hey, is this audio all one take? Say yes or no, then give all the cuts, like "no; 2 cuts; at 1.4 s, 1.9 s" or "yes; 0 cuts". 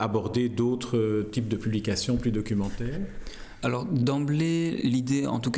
yes; 0 cuts